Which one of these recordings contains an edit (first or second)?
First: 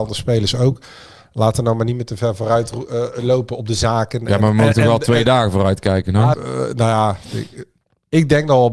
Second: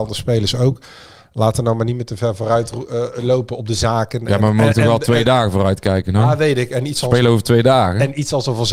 first